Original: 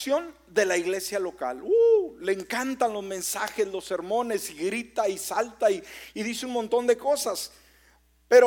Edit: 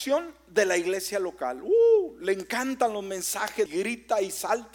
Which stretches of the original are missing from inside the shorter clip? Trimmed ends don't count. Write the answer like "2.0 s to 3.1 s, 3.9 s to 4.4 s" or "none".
3.7 s to 4.5 s